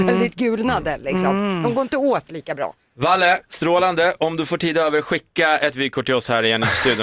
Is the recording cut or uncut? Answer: uncut